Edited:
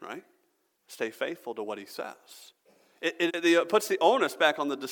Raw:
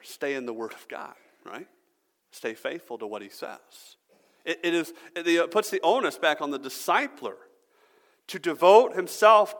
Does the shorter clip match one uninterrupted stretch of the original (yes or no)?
no